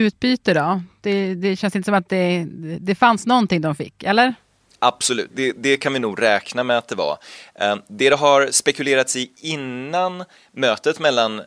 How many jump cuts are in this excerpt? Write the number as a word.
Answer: one